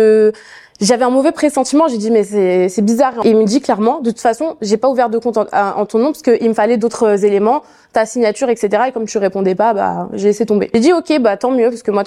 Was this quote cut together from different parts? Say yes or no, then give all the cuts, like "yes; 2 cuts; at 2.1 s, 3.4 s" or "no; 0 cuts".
no; 0 cuts